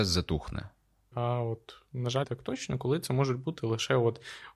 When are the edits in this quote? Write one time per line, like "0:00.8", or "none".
0:01.1
0:02.2